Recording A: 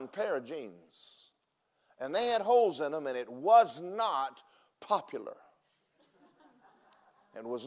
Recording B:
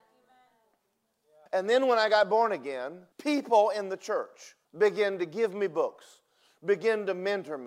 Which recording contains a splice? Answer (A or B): B